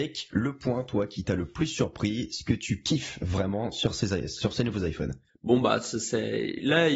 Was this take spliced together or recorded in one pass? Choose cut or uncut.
uncut